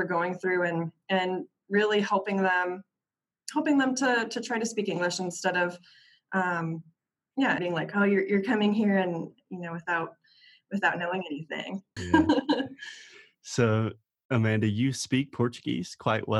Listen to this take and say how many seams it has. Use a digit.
2